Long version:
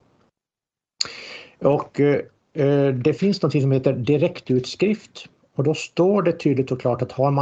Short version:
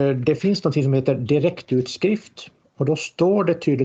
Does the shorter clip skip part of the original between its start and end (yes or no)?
no